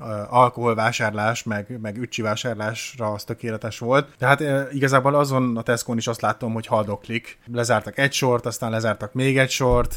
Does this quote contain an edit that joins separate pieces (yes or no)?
no